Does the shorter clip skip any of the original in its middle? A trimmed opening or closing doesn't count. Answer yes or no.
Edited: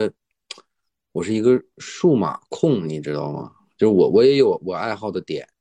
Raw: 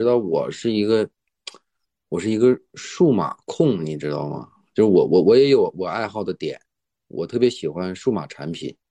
yes